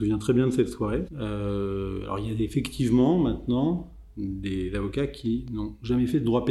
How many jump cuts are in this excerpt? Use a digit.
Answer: 1